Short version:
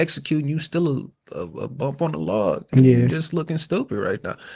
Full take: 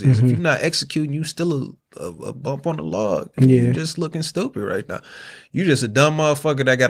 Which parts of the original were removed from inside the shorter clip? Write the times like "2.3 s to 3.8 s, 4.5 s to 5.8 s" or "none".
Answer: none